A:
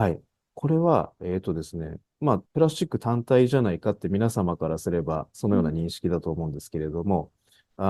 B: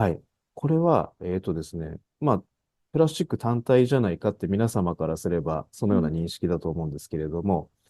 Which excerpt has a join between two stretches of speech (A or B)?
A